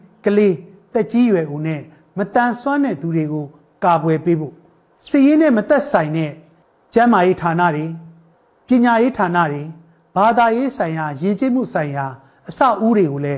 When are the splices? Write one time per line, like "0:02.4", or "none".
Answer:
none